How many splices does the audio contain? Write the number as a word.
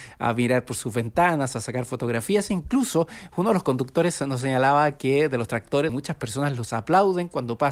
one